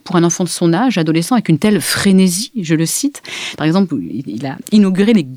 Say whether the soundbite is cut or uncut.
cut